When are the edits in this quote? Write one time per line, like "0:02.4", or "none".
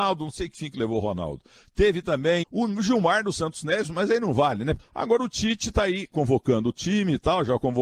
0:02.4
0:04.8